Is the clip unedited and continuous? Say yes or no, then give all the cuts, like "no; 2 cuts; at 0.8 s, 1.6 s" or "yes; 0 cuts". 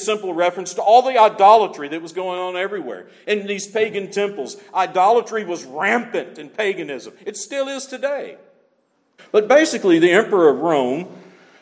no; 1 cut; at 9.2 s